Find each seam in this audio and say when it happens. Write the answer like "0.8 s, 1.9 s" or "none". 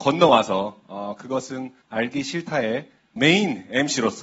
none

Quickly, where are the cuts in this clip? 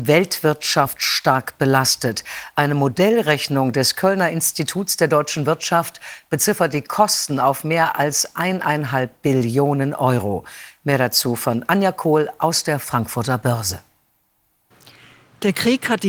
none

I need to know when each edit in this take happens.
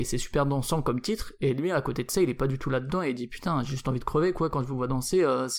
none

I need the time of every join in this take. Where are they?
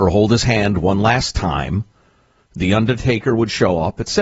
none

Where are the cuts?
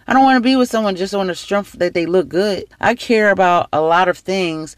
2.7 s

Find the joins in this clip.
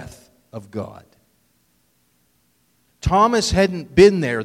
2.9 s

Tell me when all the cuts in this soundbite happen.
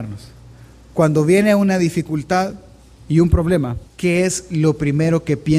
3.9 s

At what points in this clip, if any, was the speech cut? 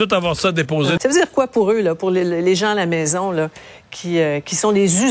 1.0 s

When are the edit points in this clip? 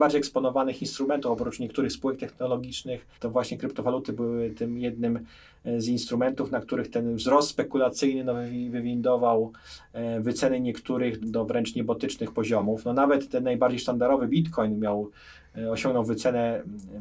3.1 s, 11.2 s

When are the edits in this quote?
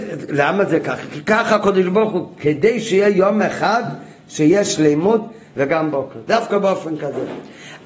5.5 s

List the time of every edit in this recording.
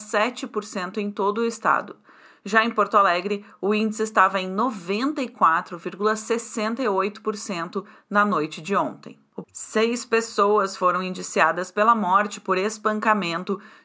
9.4 s

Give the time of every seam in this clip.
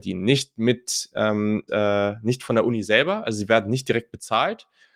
1.7 s

